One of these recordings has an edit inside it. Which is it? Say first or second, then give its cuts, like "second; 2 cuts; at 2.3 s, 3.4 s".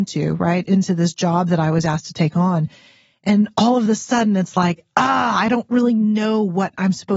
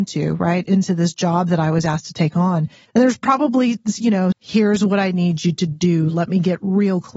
second; 2 cuts; at 2.8 s, 4.3 s